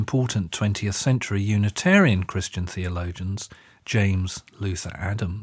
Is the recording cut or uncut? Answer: uncut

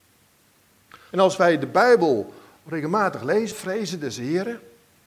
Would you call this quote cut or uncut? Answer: cut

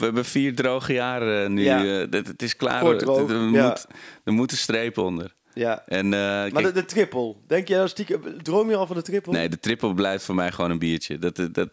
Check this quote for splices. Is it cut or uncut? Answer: uncut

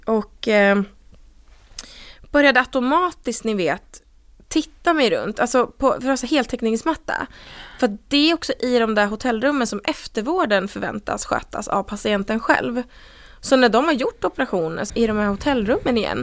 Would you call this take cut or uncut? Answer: cut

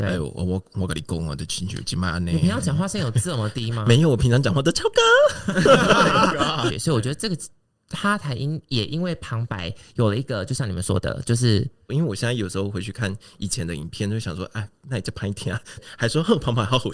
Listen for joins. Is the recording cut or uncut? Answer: cut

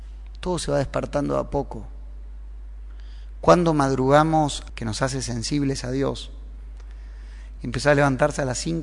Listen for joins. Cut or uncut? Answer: cut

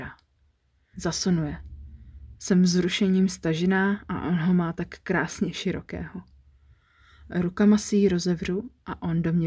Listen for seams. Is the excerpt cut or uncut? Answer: cut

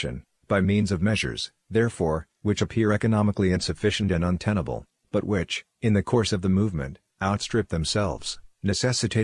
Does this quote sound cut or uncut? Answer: uncut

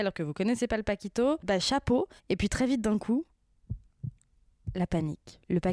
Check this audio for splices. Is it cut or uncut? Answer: cut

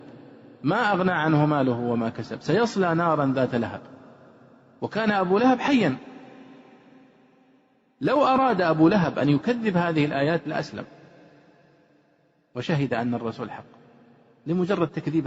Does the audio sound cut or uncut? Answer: uncut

